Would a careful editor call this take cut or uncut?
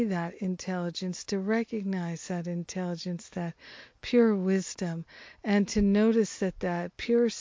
uncut